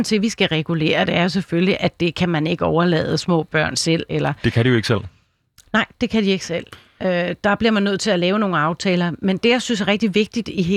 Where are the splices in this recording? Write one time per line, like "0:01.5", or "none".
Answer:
0:04.1